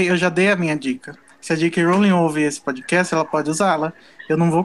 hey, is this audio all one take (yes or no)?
yes